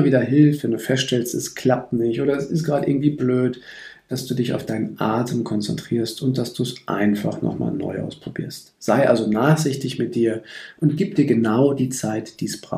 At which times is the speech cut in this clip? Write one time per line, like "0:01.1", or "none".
none